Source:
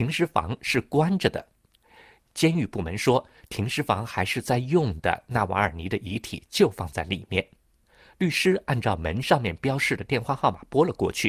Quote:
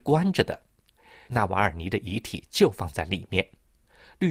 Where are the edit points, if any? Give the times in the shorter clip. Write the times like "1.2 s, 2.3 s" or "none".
1.3 s